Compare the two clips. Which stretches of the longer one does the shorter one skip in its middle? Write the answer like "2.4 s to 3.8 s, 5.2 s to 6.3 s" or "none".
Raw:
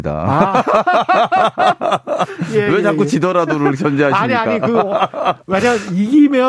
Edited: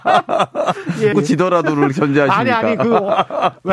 2.6 s to 3.0 s

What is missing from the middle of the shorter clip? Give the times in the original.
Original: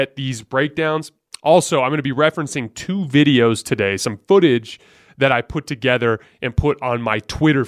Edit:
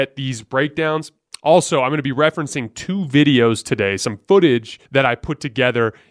4.9 s to 5.1 s

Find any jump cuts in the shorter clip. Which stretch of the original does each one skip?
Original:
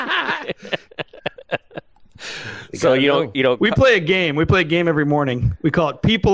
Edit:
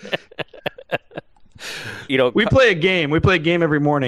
2.7 s to 3.3 s

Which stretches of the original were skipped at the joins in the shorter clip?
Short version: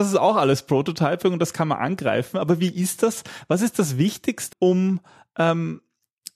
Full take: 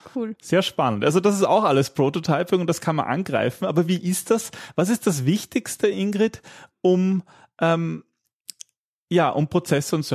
5.8 s to 6.8 s

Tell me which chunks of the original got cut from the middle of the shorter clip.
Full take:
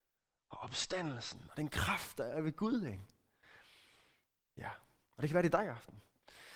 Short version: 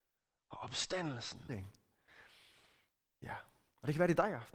1.5 s to 2.8 s

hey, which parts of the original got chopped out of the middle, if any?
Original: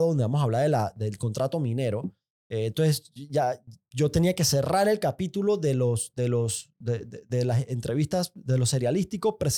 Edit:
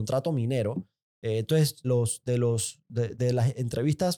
3.1 s to 5.7 s, 7.0 s to 7.3 s

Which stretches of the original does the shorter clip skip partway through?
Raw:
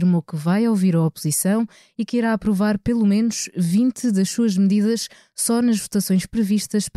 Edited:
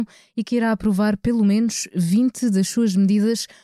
none

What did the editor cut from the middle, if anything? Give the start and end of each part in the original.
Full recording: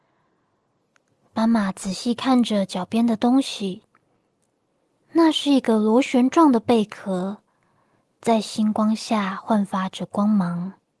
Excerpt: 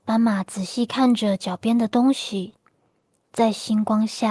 4.5 s to 8.1 s

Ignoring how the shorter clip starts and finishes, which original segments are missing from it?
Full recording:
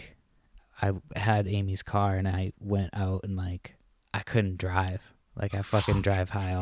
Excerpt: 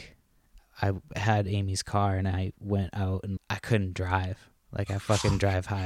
3.4 s to 4.0 s

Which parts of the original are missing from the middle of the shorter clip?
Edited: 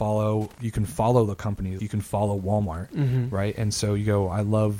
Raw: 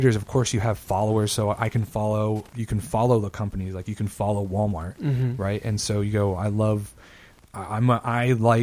3.7 s to 3.8 s

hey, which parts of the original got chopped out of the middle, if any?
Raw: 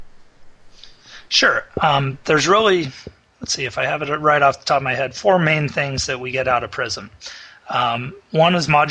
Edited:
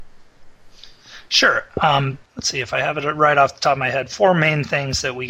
2.2 s to 3.3 s

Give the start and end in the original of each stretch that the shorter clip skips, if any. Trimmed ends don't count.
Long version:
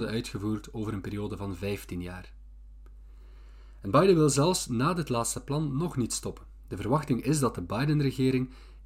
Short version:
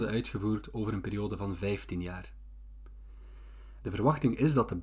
3.8 s to 6.7 s

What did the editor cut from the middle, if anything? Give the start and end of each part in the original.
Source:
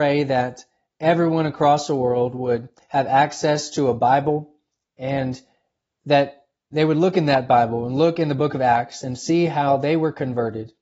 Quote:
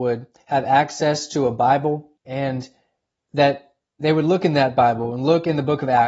4.6 s to 4.9 s

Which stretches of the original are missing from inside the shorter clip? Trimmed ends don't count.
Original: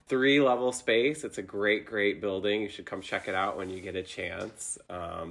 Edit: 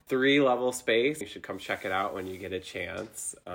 1.2 s to 2.6 s

